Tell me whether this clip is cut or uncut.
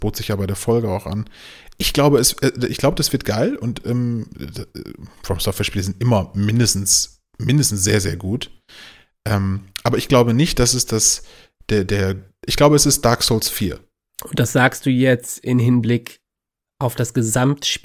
cut